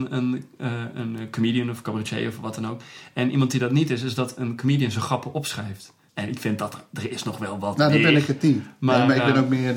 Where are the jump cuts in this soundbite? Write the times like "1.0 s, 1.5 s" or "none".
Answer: 6.1 s